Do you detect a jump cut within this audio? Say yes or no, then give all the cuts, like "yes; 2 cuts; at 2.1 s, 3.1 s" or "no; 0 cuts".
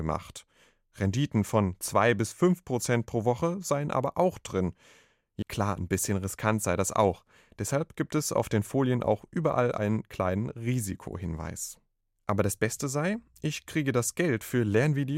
yes; 1 cut; at 5.4 s